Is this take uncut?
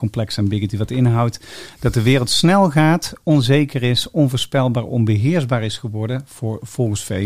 yes; 0 cuts

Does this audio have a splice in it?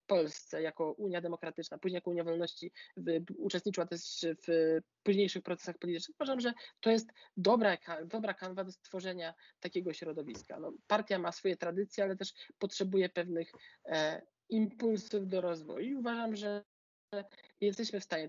no; 0 cuts

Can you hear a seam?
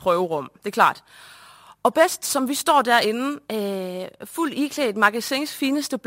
no; 0 cuts

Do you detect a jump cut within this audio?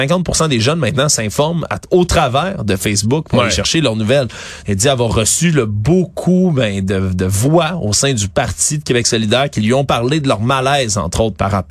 yes; 1 cut; at 4.6 s

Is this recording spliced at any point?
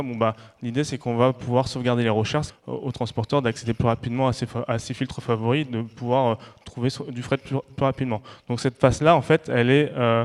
yes; 1 cut; at 2.5 s

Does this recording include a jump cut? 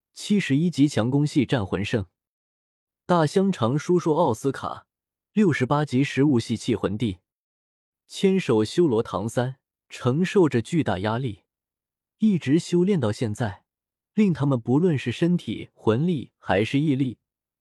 yes; 1 cut; at 9.8 s

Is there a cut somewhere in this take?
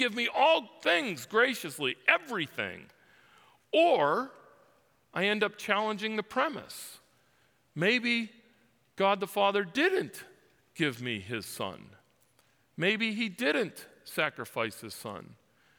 no; 0 cuts

